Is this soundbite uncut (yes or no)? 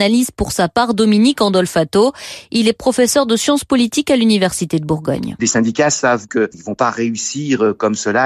yes